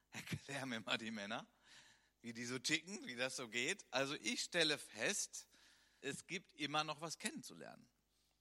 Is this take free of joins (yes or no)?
no